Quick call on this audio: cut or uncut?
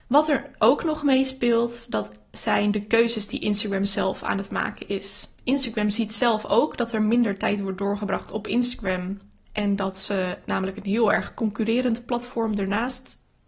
uncut